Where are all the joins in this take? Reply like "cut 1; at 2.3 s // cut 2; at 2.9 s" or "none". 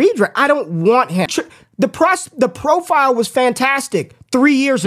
cut 1; at 1.3 s